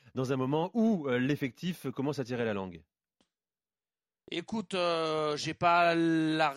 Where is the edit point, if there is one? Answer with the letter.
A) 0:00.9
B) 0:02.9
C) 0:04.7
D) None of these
D